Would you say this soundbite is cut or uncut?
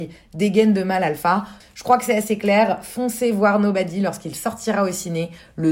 cut